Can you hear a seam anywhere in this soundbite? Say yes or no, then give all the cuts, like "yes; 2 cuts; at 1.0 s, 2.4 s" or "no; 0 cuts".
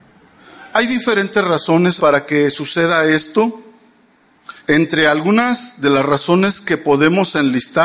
yes; 2 cuts; at 2.0 s, 4.6 s